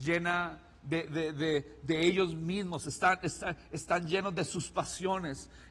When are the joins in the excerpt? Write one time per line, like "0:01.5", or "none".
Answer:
0:01.1